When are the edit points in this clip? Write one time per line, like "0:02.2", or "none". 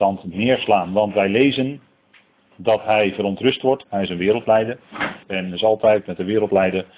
0:03.8
0:05.2